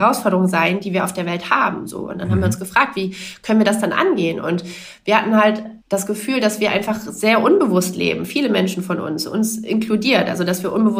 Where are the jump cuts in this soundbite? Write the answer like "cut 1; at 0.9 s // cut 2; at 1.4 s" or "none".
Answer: cut 1; at 5.8 s